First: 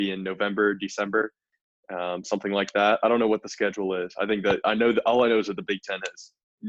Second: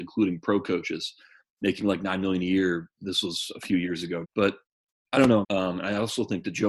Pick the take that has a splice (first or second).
second